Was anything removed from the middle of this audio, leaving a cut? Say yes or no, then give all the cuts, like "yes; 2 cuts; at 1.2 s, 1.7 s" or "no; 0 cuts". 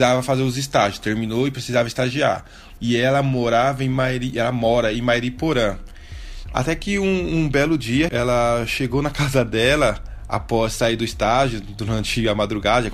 yes; 3 cuts; at 2.8 s, 6.5 s, 8.1 s